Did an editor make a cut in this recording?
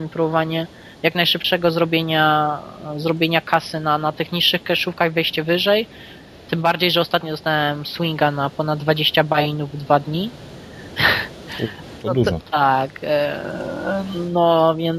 yes; 1 cut; at 12.4 s

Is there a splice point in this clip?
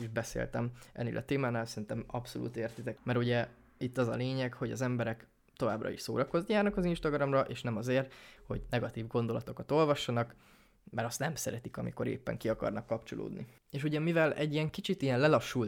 yes; 1 cut; at 3.0 s

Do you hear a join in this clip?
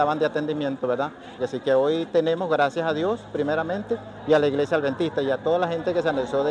yes; 1 cut; at 1.4 s

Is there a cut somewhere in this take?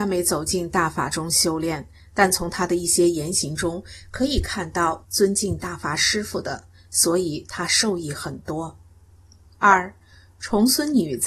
yes; 1 cut; at 5.0 s

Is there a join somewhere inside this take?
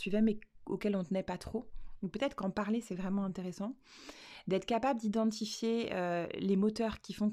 no; 0 cuts

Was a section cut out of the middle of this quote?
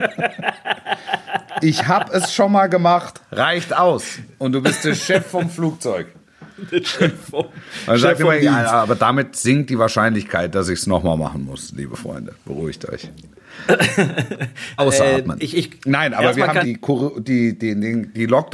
yes; 2 cuts; at 14.8 s, 16.6 s

